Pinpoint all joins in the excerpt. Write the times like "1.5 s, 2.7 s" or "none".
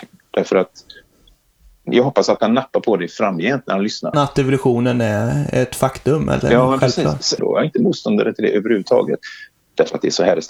4.1 s, 7.4 s, 9.5 s